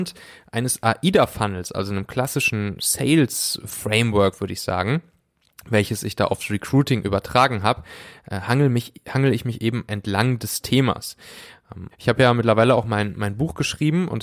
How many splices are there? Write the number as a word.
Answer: one